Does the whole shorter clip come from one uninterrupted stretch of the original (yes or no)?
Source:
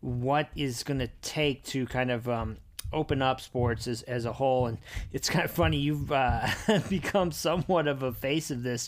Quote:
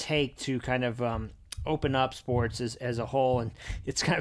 yes